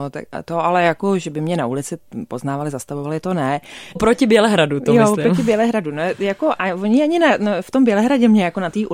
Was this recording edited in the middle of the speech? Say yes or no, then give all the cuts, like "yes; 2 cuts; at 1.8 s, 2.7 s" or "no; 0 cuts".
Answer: yes; 1 cut; at 4.0 s